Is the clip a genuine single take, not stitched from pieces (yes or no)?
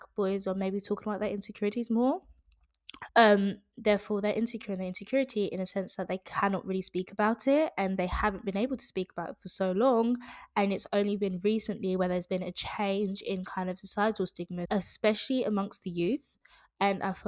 no